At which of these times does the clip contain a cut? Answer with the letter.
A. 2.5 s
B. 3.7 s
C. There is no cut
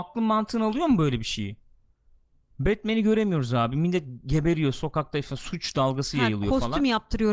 C